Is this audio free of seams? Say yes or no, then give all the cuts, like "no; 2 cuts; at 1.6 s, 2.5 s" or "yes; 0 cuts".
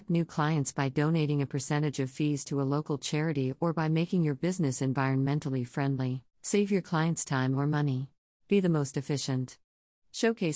no; 2 cuts; at 6.3 s, 8.4 s